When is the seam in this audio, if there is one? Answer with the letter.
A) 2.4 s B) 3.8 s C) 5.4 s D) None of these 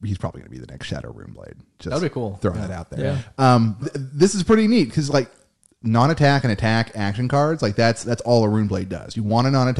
B